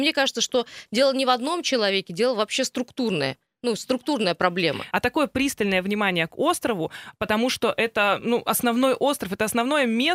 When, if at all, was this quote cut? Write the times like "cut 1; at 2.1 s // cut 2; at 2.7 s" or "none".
cut 1; at 4.9 s

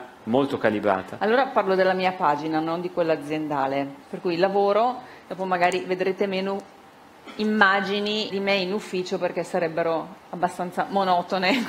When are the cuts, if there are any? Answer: cut 1; at 4.0 s // cut 2; at 8.3 s

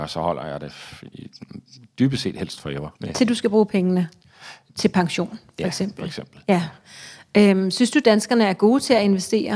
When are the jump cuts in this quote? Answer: cut 1; at 3.0 s // cut 2; at 4.7 s

